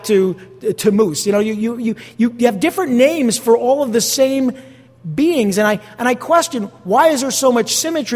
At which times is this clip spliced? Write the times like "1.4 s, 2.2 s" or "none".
none